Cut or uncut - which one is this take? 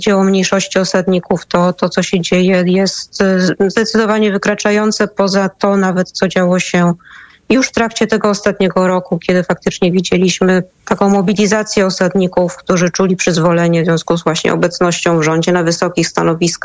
uncut